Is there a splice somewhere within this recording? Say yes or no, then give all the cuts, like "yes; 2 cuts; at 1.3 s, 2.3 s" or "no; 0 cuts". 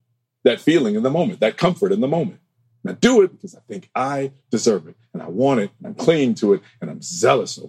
yes; 1 cut; at 2.7 s